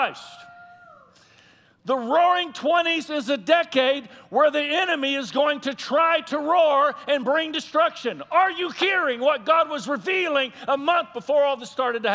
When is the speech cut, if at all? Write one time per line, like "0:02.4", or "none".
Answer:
none